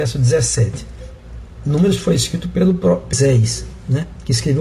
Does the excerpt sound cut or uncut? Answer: uncut